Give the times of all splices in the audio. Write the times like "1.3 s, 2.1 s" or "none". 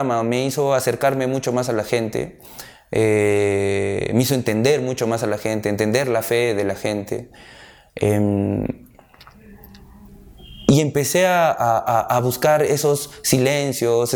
none